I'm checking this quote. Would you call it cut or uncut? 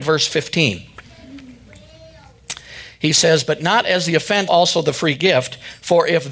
cut